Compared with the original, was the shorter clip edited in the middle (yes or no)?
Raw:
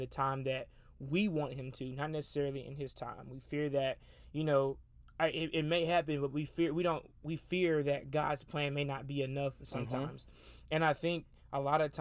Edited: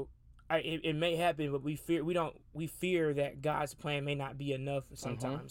no